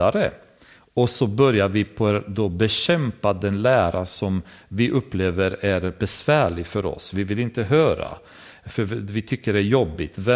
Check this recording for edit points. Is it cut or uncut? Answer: uncut